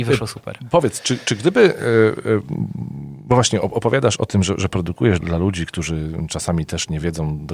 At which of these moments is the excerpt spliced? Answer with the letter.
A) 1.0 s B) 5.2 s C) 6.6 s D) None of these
B